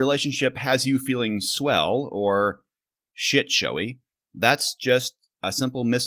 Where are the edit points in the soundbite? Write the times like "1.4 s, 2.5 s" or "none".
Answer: none